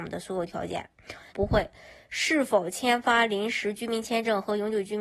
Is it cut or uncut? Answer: cut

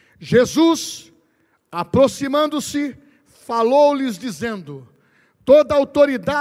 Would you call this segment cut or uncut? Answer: uncut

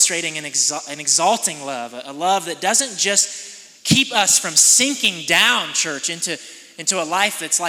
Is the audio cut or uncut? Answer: uncut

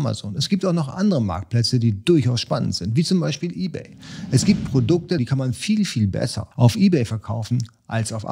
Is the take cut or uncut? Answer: cut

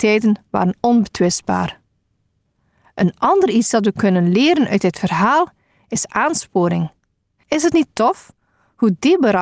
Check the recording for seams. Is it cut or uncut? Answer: cut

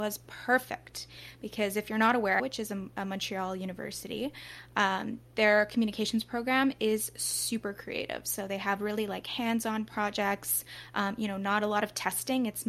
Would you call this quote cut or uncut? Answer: cut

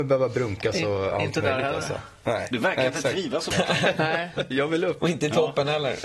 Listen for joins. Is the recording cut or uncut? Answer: cut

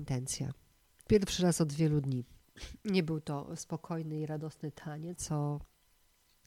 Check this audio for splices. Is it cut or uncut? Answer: cut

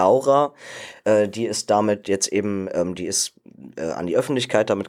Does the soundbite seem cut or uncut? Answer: uncut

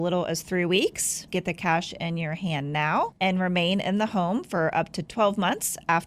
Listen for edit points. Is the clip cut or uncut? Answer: cut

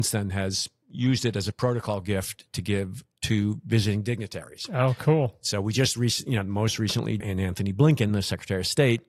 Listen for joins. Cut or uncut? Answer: cut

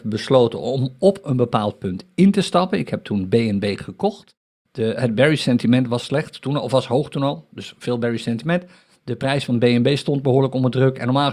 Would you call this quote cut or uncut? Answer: cut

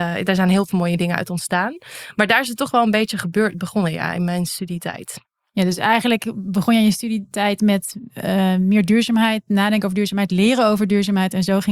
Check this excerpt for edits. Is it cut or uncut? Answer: uncut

